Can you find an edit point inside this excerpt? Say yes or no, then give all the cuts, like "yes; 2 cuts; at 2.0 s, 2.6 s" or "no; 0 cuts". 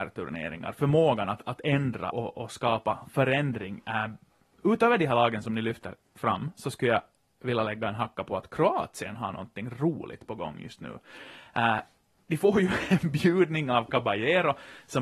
yes; 1 cut; at 2.1 s